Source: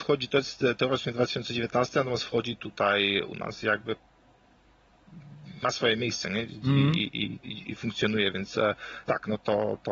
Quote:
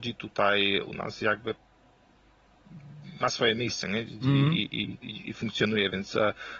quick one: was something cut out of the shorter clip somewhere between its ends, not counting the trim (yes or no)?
no